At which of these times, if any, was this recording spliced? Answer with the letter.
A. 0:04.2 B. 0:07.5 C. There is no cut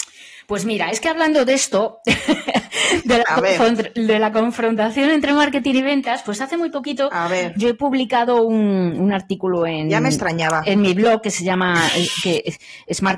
C